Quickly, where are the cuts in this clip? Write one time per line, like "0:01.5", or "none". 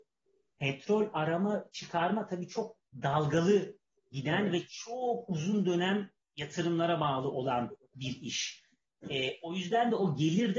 0:09.0